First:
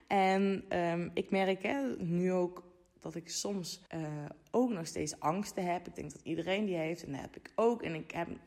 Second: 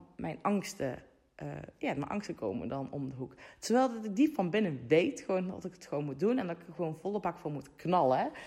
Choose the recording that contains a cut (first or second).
first